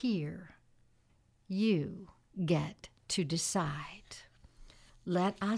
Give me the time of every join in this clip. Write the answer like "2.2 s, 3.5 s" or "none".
none